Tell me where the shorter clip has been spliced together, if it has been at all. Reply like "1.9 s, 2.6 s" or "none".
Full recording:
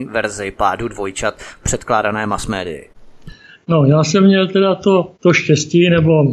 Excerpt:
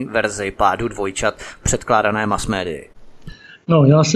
none